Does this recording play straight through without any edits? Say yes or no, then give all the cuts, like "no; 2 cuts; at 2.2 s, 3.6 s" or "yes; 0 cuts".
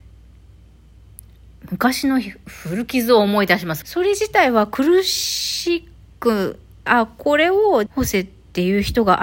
no; 3 cuts; at 3.8 s, 6.9 s, 7.9 s